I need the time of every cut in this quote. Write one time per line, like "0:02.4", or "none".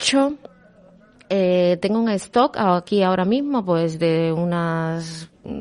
none